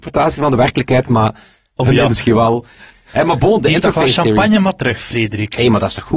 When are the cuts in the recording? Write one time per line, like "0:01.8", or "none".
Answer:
0:02.1

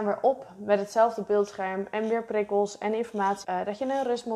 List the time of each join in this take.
0:03.4

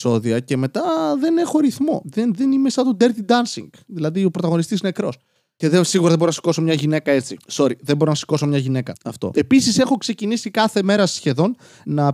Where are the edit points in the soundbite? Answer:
none

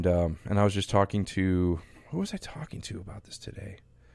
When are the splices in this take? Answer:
none

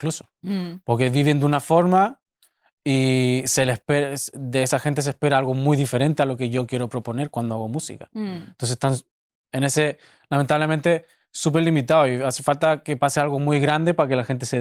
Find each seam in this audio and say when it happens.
none

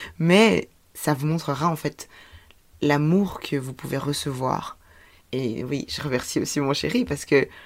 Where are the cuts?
0:05.2

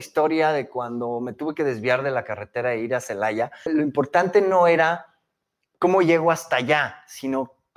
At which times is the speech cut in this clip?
0:03.7

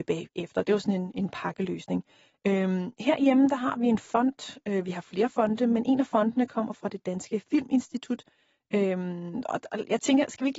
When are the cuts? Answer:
none

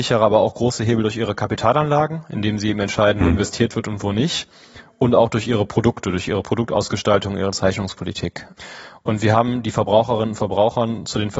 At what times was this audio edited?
none

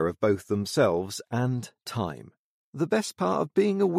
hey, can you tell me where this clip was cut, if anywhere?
0:02.5

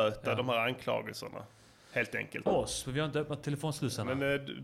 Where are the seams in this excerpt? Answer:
0:02.5

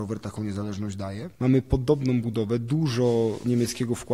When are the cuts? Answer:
0:01.4

